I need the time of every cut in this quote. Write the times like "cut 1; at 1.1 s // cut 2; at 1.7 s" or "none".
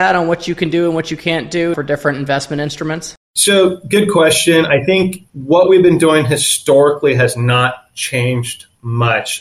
cut 1; at 1.7 s // cut 2; at 3.2 s // cut 3; at 5.3 s